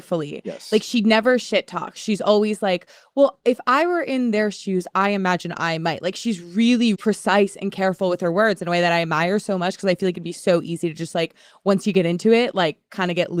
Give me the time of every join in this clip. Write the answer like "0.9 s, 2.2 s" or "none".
6.9 s